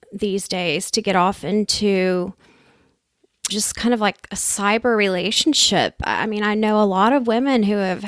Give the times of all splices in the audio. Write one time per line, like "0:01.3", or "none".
0:03.5